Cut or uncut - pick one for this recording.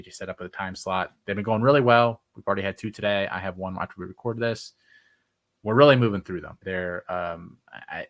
cut